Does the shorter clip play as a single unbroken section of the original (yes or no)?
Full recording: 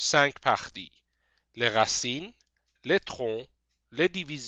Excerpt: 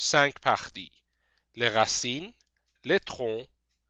yes